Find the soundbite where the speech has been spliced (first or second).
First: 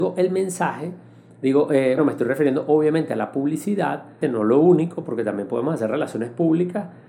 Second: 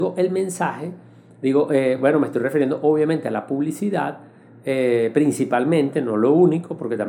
first